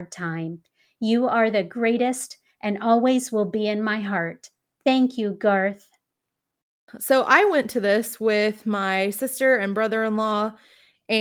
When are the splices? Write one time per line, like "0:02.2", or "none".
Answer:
none